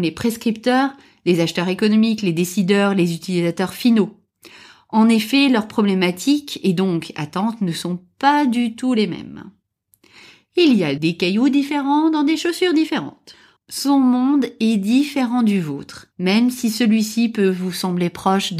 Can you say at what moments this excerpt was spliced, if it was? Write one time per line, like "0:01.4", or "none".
0:11.0
0:13.6
0:16.1